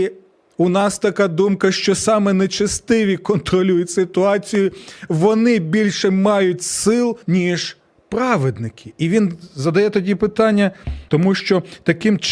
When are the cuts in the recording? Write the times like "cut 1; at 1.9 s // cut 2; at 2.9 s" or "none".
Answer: cut 1; at 7.2 s // cut 2; at 11.1 s